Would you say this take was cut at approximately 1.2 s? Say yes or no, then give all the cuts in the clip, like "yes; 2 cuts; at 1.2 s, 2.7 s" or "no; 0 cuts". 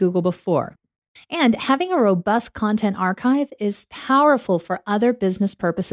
yes; 1 cut; at 1.2 s